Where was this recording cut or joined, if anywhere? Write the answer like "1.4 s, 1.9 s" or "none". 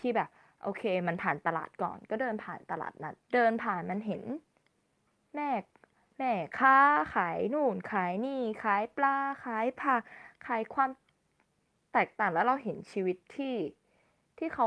3.2 s